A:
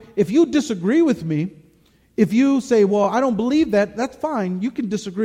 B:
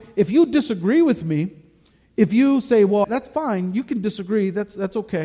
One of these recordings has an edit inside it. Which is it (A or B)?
B